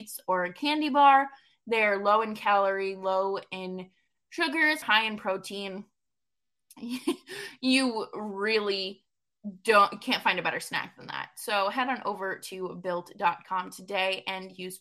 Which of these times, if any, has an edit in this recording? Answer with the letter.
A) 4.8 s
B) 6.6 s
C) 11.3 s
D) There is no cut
A